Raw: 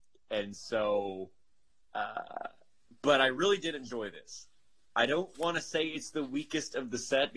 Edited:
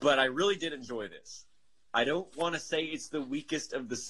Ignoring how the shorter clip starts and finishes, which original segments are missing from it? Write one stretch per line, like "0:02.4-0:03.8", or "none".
none